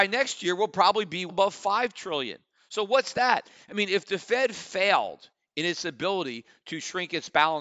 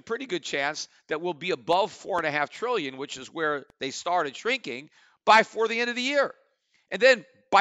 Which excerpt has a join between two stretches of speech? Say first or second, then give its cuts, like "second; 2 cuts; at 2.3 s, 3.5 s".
first; 1 cut; at 1.3 s